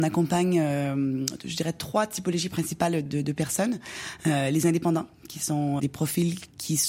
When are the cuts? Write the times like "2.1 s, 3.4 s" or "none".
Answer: 3.1 s, 5.8 s